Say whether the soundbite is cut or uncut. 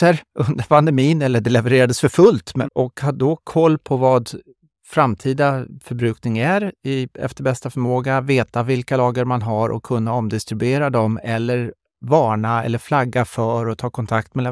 cut